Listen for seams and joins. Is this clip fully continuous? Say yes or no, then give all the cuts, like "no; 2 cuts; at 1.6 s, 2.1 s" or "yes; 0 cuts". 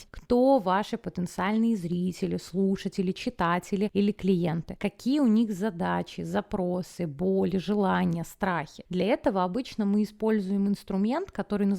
yes; 0 cuts